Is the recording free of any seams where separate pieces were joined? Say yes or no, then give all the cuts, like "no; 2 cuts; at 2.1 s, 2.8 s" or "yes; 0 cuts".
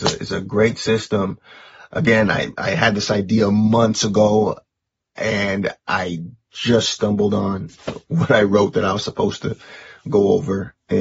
yes; 0 cuts